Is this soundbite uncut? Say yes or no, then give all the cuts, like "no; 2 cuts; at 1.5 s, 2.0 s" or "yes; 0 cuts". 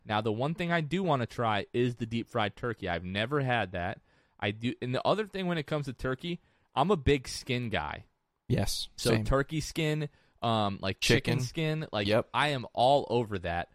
yes; 0 cuts